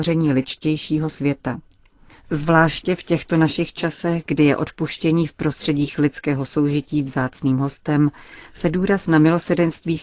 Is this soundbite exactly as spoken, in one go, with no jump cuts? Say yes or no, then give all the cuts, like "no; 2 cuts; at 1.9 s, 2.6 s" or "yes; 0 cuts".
yes; 0 cuts